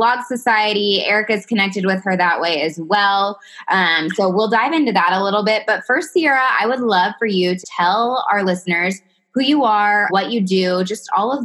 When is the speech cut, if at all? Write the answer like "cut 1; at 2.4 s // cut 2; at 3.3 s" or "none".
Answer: cut 1; at 7.6 s // cut 2; at 10.1 s